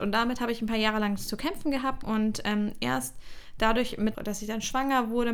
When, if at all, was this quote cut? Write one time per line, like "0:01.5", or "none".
0:02.0
0:04.1